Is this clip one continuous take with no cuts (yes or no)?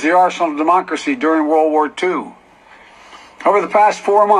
yes